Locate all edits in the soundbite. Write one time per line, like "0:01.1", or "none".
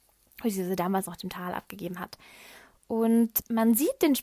none